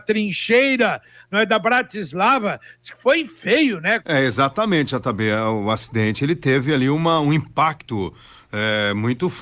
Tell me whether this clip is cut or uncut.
cut